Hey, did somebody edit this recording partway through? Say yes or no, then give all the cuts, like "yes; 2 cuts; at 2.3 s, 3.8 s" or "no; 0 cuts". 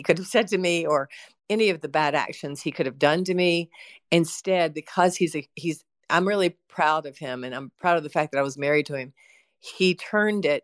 no; 0 cuts